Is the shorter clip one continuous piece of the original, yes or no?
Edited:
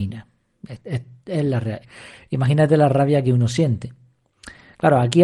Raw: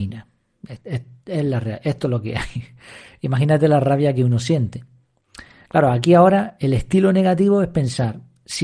no